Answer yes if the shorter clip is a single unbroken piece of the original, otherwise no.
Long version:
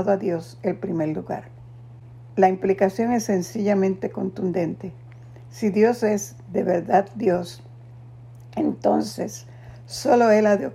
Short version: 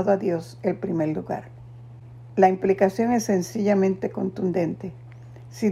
yes